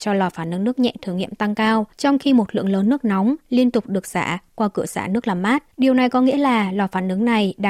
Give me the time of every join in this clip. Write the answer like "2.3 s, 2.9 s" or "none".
1.9 s, 5.7 s